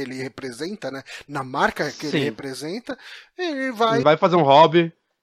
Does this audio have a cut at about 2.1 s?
no; 1 cut; at 4.0 s

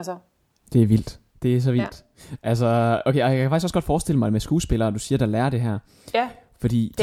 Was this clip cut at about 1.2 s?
no; 0 cuts

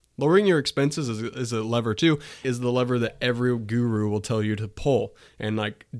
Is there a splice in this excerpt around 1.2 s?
no; 1 cut; at 2.4 s

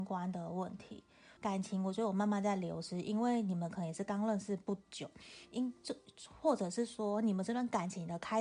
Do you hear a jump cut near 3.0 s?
no; 1 cut; at 1.4 s

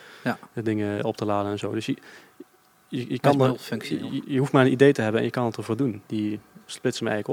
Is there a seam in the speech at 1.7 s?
no; 2 cuts; at 4.2 s, 6.0 s

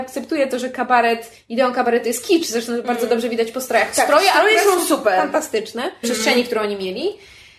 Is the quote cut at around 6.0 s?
yes; 1 cut; at 6.0 s

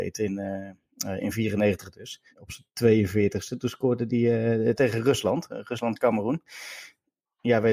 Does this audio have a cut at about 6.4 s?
no; 2 cuts; at 2.3 s, 4.8 s

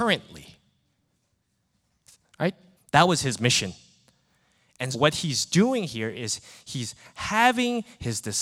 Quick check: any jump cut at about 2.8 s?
yes; 2 cuts; at 2.8 s, 4.9 s

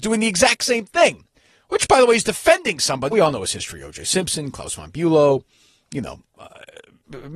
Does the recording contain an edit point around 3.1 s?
yes; 1 cut; at 3.1 s

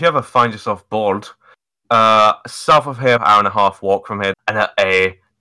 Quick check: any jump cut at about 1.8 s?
no; 2 cuts; at 3.2 s, 4.3 s

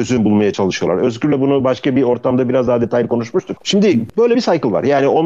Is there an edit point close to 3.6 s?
yes; 1 cut; at 3.6 s

